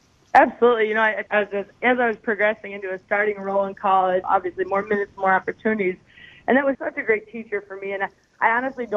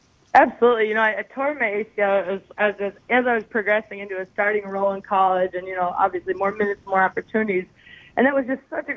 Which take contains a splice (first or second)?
first